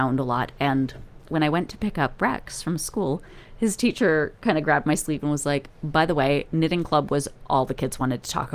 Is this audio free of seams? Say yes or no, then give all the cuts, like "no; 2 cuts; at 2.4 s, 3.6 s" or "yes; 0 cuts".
yes; 0 cuts